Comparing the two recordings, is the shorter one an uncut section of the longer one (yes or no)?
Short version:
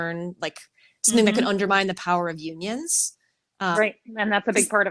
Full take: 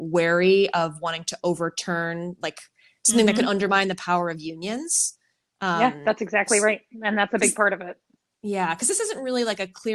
no